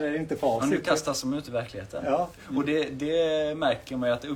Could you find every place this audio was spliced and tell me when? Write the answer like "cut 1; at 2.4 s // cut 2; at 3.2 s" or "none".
cut 1; at 2.4 s